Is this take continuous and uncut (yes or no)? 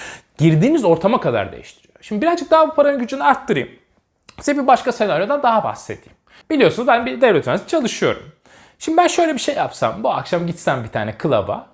yes